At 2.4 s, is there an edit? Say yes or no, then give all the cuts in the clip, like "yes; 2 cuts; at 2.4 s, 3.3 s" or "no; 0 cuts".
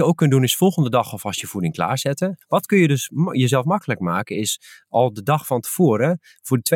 yes; 1 cut; at 2.4 s